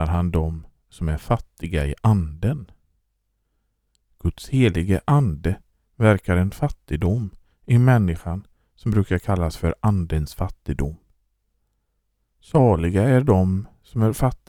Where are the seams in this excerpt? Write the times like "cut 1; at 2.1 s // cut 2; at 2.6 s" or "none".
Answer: none